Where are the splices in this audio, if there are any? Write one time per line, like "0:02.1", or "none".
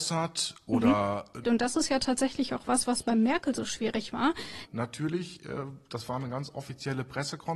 0:01.4
0:04.7